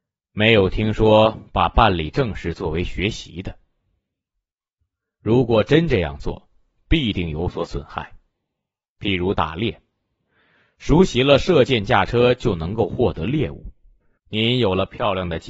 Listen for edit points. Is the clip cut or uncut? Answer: cut